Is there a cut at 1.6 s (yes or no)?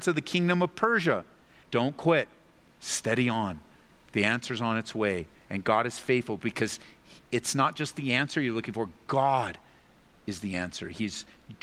yes